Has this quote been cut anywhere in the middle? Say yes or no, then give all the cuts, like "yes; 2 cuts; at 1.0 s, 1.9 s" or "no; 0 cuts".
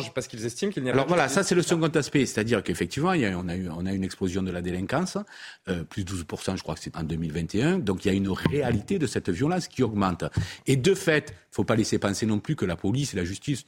yes; 1 cut; at 6.9 s